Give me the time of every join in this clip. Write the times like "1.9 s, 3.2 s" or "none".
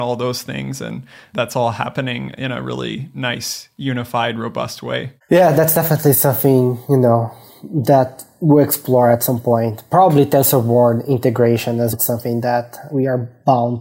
11.9 s